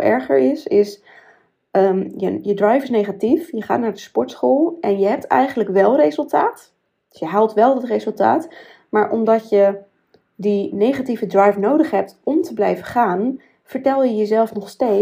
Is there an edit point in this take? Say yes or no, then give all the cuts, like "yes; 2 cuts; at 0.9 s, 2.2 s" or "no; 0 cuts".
no; 0 cuts